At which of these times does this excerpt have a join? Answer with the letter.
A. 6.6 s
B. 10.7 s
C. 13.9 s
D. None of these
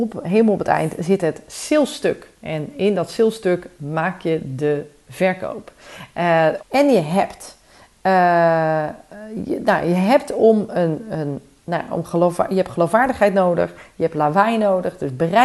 A